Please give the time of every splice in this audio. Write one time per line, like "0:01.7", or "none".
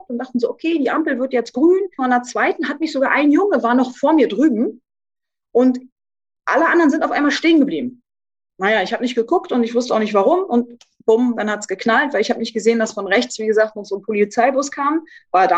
0:02.0